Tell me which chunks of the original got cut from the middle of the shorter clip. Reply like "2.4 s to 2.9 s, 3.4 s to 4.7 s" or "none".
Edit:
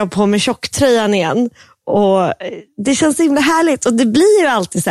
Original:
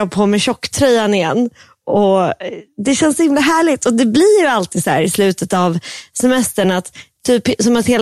none